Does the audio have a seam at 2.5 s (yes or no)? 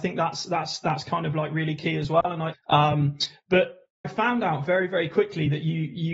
yes